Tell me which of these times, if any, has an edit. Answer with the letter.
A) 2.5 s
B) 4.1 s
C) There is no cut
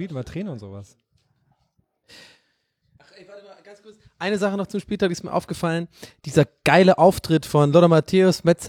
C